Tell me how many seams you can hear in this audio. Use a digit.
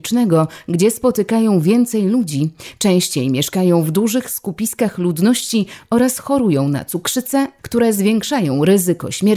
1